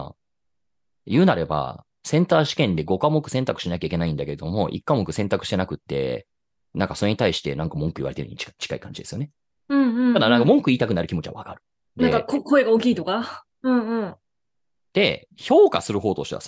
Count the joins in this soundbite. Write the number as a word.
two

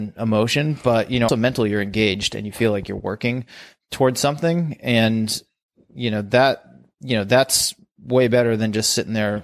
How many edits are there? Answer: one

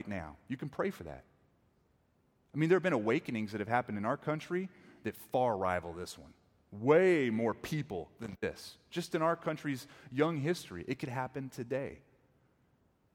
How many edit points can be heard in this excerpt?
zero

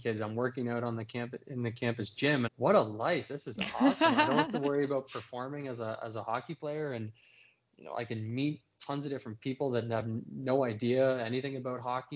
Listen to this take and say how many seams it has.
one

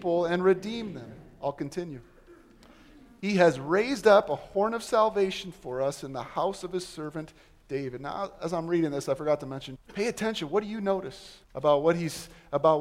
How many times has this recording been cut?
two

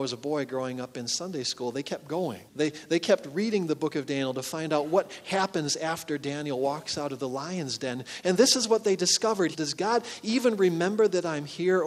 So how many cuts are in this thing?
two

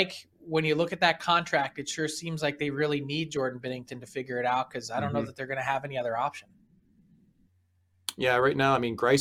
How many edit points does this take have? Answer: zero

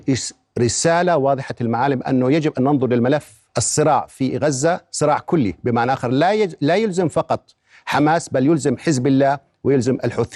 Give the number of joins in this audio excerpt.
one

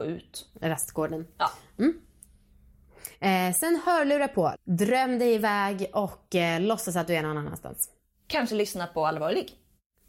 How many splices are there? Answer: one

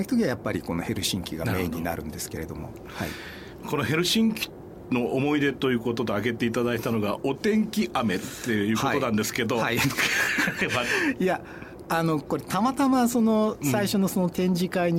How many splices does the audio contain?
zero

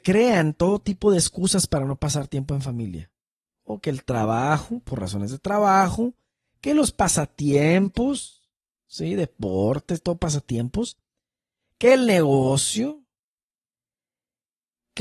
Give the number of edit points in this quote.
zero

